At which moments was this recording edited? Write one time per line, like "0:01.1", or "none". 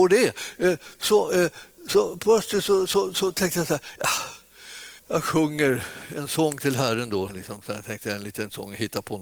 0:05.0
0:07.3